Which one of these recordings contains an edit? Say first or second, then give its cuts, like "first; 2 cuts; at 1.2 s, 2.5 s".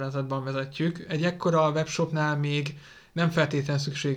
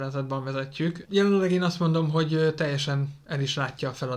second; 1 cut; at 1.0 s